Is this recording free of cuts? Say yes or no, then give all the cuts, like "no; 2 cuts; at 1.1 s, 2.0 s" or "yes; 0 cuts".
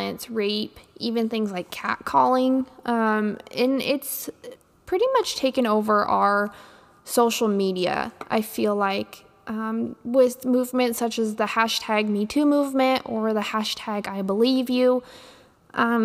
yes; 0 cuts